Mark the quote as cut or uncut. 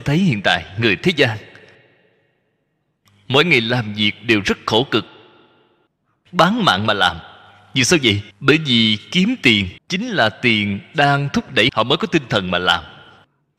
cut